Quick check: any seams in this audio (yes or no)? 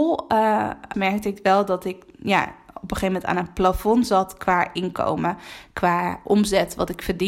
yes